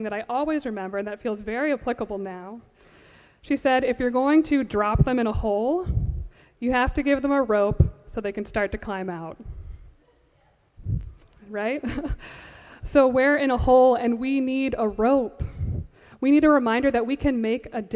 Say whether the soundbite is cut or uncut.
uncut